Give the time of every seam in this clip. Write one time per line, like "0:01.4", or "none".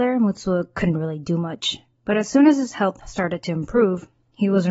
none